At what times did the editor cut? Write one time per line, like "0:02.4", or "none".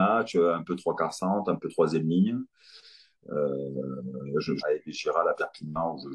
0:04.6